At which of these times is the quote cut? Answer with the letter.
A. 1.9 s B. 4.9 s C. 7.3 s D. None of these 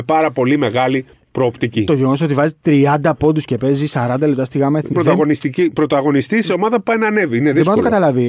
B